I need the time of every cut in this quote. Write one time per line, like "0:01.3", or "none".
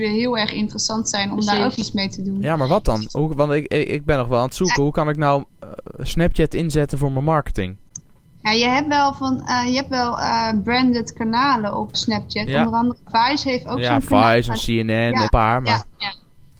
0:11.9
0:15.3